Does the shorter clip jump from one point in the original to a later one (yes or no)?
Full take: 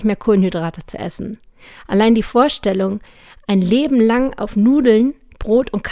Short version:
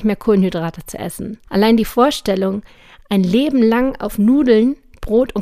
yes